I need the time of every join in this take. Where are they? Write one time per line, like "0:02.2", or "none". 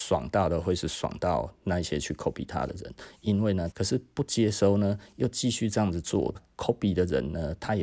0:03.7
0:06.3